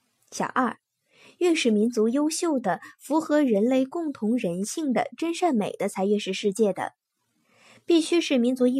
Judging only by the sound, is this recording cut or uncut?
uncut